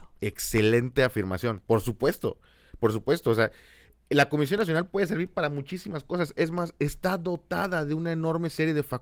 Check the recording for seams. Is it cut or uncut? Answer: uncut